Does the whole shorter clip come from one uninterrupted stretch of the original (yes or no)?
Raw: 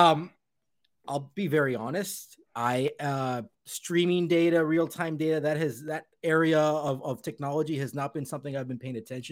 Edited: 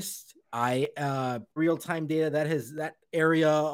no